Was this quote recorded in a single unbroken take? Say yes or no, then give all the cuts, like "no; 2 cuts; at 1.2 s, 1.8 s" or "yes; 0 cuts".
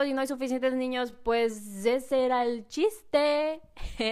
yes; 0 cuts